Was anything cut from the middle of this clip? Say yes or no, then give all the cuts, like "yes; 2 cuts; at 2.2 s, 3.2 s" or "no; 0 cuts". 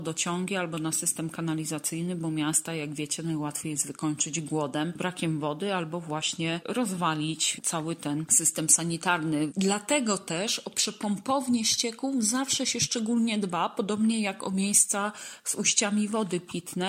yes; 1 cut; at 9.5 s